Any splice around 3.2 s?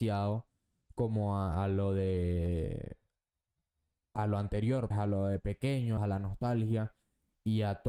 no; 2 cuts; at 4.9 s, 6.0 s

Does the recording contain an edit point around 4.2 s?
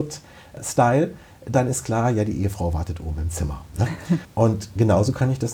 yes; 1 cut; at 4.2 s

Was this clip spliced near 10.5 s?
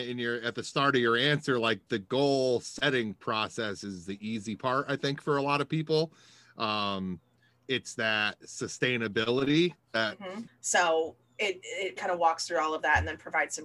yes; 2 cuts; at 10.5 s, 12.0 s

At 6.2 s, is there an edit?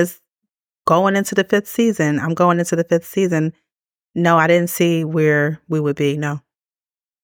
no; 0 cuts

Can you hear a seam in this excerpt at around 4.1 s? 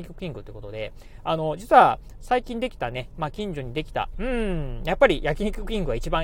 yes; 2 cuts; at 2.2 s, 4.1 s

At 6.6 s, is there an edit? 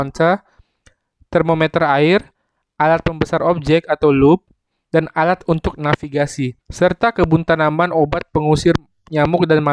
yes; 2 cuts; at 4.7 s, 6.6 s

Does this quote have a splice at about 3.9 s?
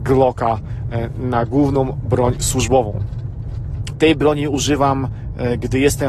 yes; 1 cut; at 3.9 s

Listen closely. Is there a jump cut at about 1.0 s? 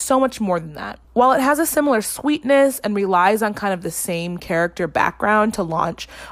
yes; 1 cut; at 1.0 s

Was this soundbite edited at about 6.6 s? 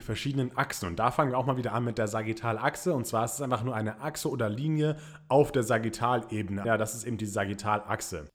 yes; 1 cut; at 6.6 s

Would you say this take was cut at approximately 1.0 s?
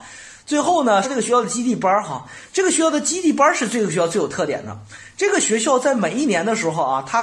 yes; 1 cut; at 1.0 s

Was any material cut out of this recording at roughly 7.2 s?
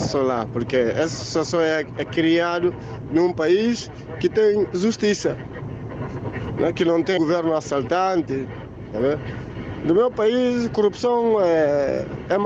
yes; 1 cut; at 7.2 s

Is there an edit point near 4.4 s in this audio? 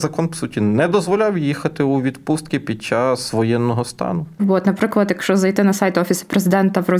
yes; 1 cut; at 4.4 s

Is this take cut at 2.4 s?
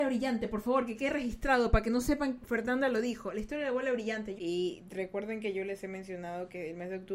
yes; 2 cuts; at 2.4 s, 4.4 s

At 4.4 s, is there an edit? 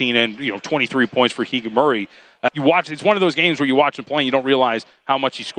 no; 1 cut; at 2.5 s

